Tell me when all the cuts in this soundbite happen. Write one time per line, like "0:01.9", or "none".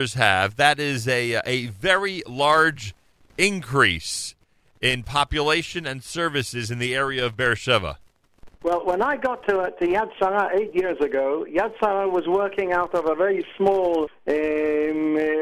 0:08.5
0:14.1